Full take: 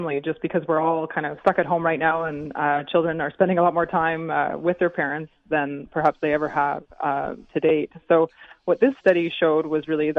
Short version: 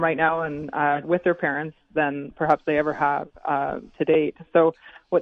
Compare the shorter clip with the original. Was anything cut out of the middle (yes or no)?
yes